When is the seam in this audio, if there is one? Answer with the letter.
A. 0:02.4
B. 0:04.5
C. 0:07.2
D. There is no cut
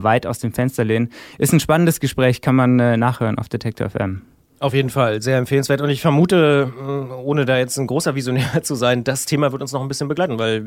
D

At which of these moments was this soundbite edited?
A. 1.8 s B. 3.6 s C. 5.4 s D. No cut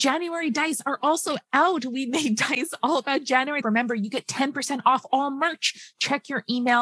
B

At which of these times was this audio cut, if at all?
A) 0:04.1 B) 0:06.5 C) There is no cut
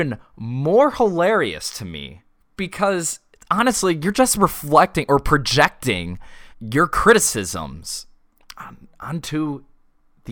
B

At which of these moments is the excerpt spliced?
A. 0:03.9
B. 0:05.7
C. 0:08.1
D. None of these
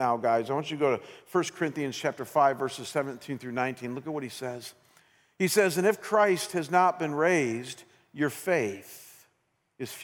D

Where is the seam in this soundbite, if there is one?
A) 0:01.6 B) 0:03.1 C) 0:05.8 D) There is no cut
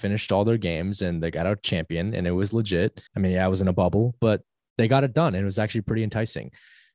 B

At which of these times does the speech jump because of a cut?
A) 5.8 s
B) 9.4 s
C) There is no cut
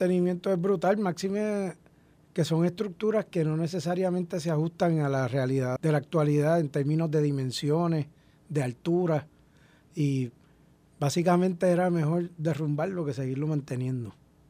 A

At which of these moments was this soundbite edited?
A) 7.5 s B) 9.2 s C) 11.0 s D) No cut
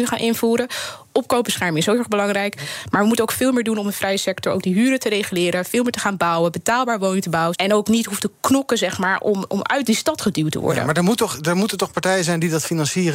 A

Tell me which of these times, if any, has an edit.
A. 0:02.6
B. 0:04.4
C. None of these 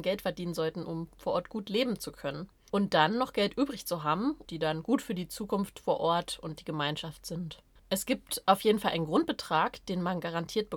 B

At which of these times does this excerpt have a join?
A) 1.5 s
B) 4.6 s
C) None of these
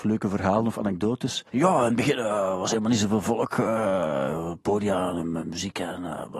A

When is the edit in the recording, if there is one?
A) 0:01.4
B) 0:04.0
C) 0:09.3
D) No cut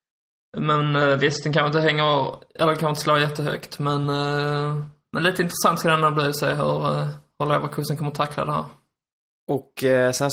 D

